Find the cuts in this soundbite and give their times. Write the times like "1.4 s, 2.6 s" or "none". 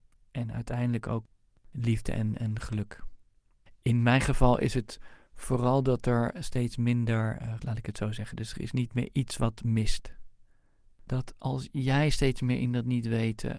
7.6 s, 10.8 s